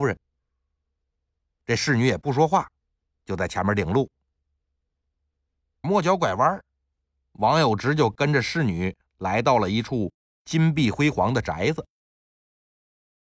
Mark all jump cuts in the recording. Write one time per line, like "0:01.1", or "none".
0:03.1
0:05.8